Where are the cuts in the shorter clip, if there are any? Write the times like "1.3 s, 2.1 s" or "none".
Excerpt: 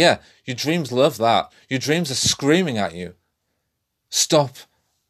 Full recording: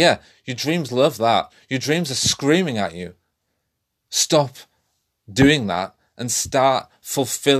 none